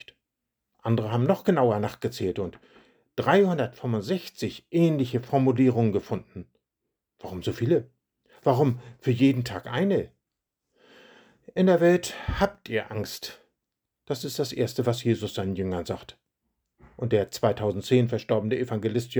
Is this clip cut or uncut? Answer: uncut